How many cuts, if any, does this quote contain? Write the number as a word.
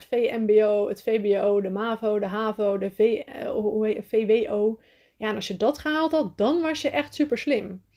zero